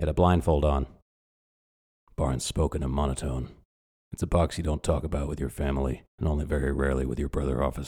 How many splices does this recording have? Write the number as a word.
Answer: two